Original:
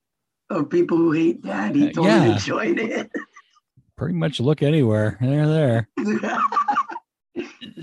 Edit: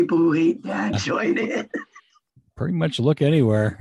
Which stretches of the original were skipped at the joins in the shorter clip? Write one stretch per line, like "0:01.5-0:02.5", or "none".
0:01.7-0:02.3

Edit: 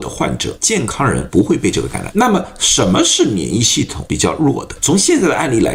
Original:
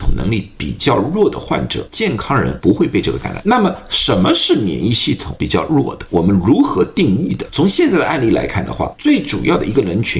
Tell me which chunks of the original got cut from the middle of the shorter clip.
0:06.1-0:07.5

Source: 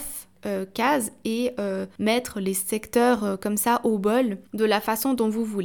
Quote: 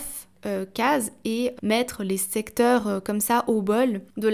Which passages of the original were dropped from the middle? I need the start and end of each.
0:01.6-0:01.9

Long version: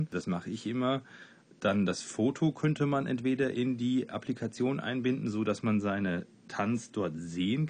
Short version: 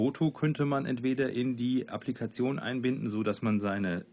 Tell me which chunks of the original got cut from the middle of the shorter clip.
none

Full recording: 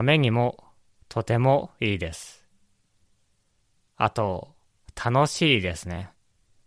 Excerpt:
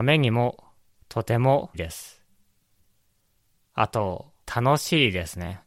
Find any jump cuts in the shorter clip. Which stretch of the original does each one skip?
0:01.7-0:02.0
0:04.7-0:04.9

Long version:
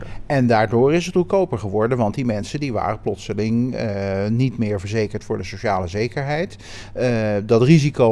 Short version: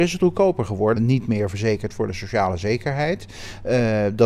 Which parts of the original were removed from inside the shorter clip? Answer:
0:01.9-0:04.3

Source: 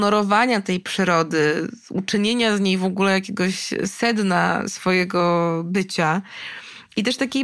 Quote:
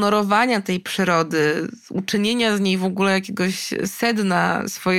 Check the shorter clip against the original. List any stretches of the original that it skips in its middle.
none

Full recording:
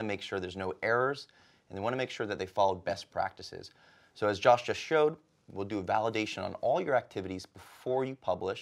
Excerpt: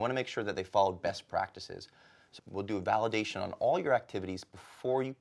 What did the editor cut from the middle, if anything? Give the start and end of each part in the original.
0:04.2-0:05.4

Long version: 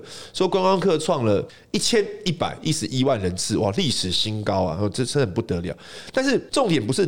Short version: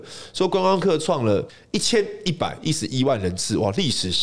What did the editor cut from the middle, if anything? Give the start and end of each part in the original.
none

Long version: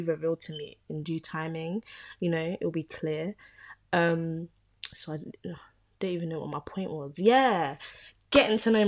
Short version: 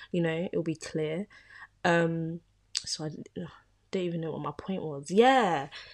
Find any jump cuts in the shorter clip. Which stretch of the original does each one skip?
none

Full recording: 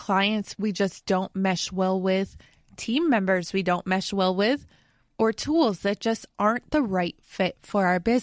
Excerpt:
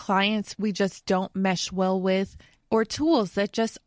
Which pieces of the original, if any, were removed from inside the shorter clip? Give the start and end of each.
0:02.6-0:05.0

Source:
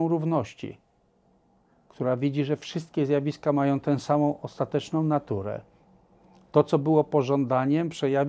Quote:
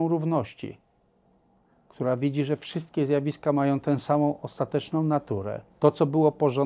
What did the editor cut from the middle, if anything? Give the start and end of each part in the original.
0:05.7-0:06.4

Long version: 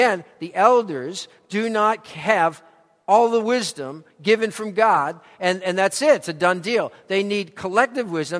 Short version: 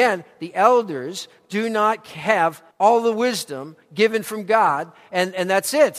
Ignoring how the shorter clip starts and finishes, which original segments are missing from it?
0:02.7-0:03.0

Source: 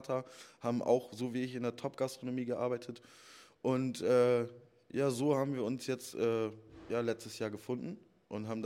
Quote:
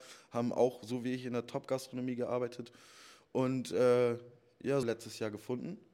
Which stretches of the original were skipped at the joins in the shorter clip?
0:05.1-0:07.0

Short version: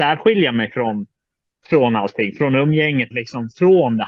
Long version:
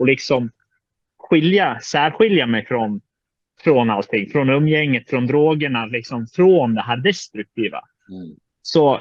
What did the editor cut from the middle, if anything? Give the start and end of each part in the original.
0:05.0-0:05.9

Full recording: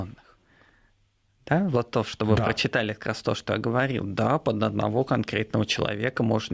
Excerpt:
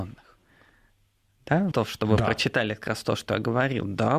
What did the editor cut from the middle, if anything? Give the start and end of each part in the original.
0:01.7-0:01.9

